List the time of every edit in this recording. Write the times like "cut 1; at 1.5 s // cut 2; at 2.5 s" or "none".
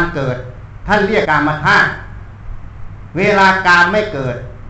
cut 1; at 1.2 s